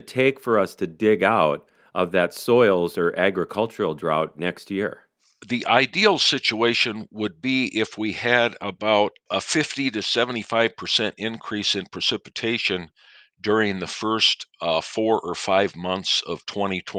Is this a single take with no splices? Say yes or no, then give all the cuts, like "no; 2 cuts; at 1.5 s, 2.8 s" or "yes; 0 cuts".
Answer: yes; 0 cuts